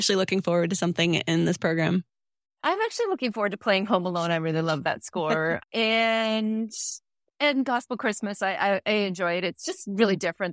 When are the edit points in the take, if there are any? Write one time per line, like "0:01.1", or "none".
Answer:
none